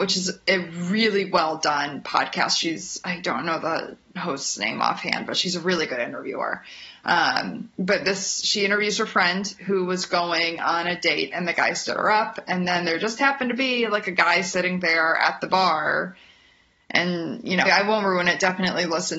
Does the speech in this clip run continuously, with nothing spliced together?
no; 1 cut; at 17.7 s

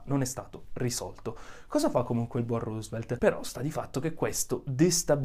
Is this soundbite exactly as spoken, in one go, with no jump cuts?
no; 1 cut; at 3.2 s

